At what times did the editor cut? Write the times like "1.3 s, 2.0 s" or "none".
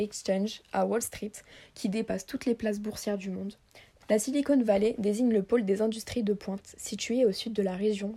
4.0 s